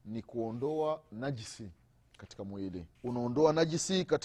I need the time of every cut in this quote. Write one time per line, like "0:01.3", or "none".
0:02.9